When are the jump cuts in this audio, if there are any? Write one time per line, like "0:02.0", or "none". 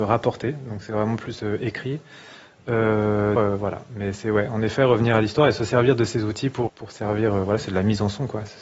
0:03.4
0:06.7